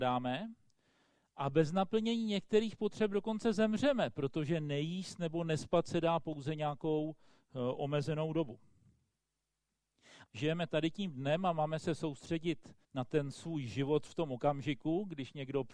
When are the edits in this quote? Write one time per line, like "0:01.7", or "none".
0:10.2
0:12.8